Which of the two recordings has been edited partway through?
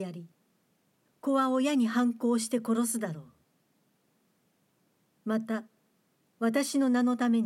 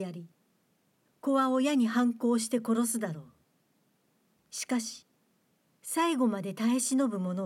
second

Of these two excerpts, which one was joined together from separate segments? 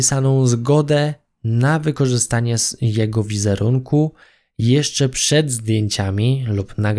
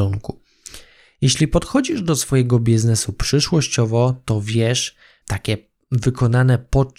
second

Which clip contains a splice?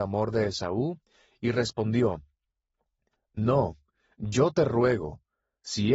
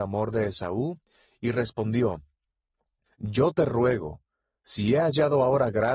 second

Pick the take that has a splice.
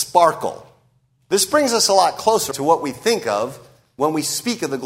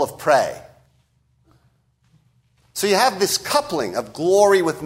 first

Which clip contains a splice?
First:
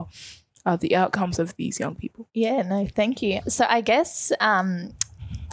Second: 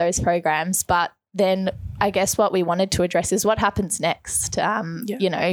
first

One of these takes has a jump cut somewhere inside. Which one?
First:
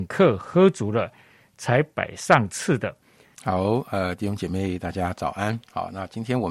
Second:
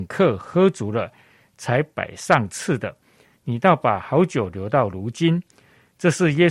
first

